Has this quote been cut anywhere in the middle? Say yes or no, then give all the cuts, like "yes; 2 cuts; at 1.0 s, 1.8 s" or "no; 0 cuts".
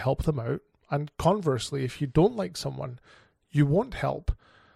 no; 0 cuts